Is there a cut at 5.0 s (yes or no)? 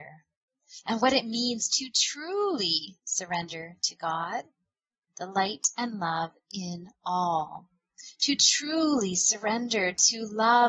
yes